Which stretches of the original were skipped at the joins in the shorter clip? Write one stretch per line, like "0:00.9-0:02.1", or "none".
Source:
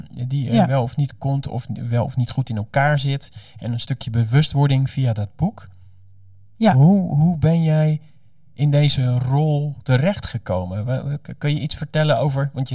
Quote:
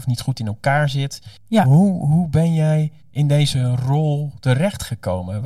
0:03.5-0:06.5
0:08.1-0:08.4